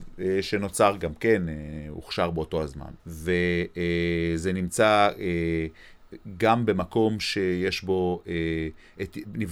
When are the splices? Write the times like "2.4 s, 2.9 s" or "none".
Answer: 3.0 s